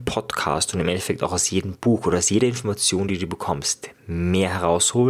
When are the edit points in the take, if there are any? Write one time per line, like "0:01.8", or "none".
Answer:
none